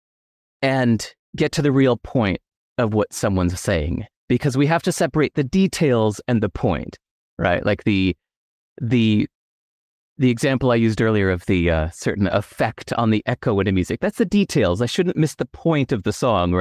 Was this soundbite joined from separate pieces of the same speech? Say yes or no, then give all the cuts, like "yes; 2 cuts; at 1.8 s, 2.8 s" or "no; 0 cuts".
no; 0 cuts